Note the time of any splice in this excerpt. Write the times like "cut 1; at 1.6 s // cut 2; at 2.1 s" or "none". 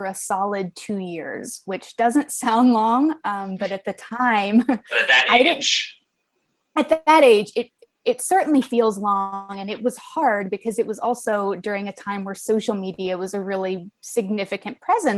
none